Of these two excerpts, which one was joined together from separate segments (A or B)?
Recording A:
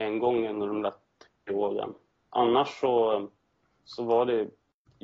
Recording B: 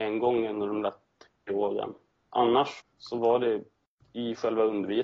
B